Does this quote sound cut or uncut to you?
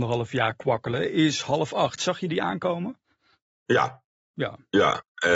uncut